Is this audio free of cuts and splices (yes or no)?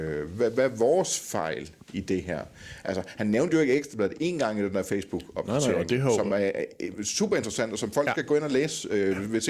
yes